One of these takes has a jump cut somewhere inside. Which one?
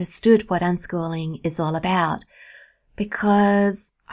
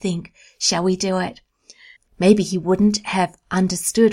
second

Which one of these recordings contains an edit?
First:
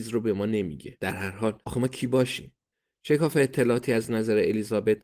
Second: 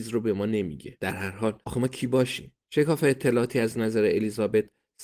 second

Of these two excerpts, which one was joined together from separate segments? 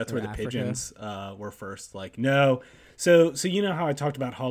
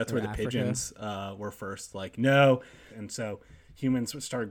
second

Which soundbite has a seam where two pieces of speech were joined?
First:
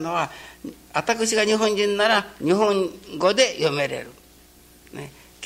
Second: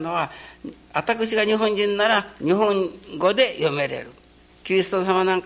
second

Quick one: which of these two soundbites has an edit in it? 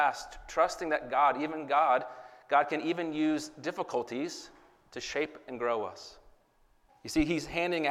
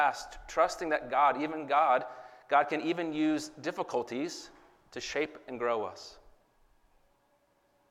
first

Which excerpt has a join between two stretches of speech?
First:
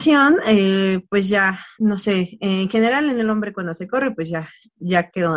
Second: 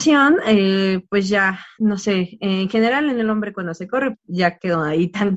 second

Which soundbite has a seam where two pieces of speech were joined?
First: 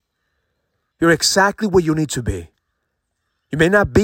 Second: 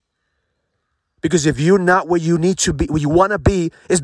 first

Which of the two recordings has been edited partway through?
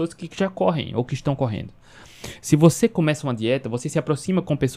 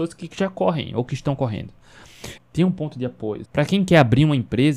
second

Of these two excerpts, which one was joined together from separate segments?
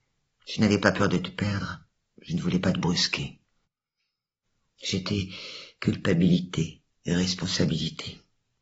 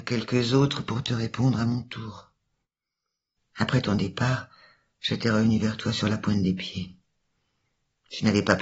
second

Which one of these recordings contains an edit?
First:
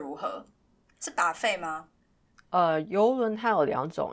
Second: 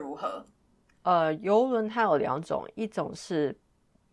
second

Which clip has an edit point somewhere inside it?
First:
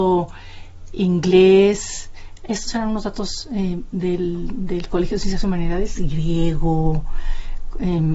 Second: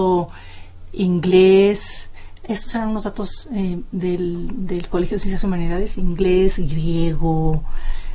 first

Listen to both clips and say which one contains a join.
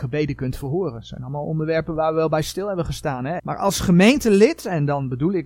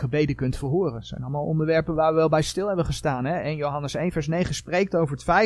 first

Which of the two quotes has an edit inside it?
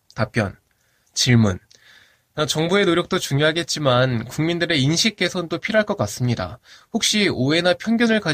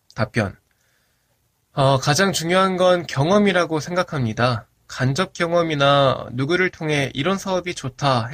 first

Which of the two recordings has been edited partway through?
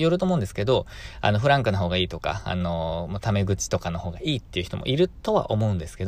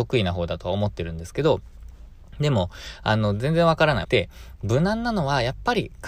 second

